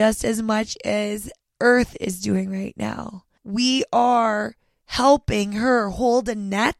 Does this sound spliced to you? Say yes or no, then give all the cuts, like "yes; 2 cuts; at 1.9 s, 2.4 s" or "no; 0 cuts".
yes; 1 cut; at 3.4 s